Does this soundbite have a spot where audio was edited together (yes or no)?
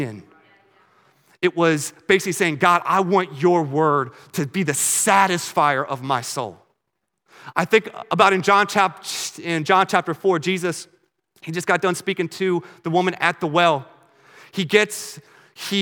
no